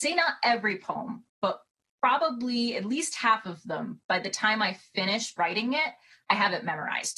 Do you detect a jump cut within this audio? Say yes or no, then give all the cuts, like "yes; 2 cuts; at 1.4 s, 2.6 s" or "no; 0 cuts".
no; 0 cuts